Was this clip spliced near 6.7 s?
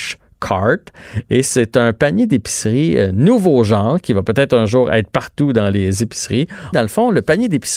yes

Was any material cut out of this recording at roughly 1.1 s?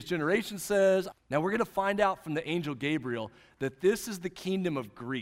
yes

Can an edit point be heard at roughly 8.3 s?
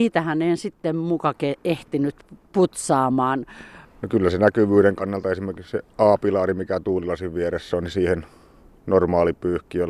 no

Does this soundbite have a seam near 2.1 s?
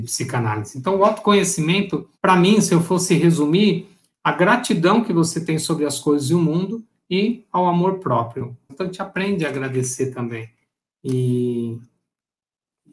yes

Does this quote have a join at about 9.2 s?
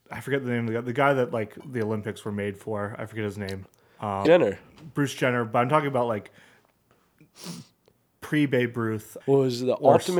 yes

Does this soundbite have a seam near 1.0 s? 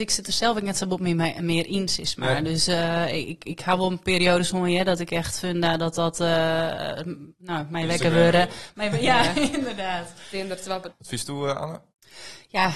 no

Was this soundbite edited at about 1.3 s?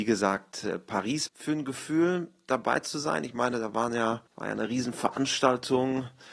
yes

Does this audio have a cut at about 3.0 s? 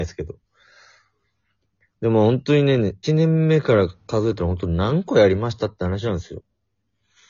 yes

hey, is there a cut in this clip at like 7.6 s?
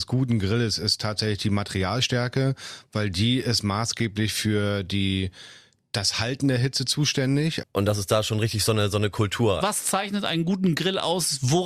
yes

